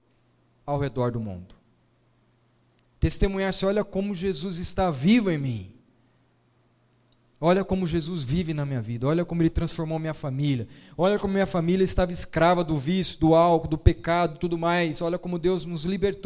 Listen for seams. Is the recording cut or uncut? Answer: uncut